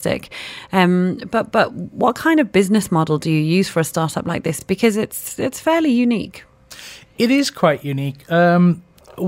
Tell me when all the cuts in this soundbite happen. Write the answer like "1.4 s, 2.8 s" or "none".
none